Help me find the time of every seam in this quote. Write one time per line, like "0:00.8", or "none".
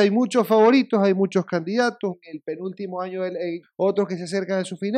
0:02.1
0:03.6